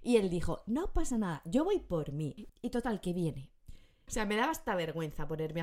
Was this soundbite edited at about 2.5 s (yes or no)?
yes